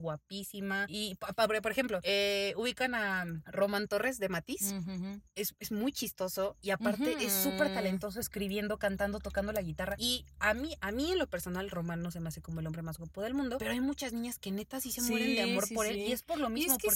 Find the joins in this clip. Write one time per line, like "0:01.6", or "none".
none